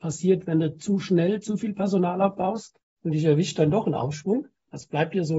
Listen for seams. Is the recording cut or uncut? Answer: uncut